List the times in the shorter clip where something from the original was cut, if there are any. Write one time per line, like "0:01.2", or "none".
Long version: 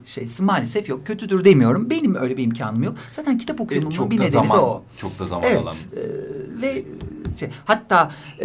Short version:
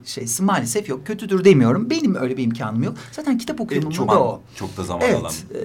0:04.1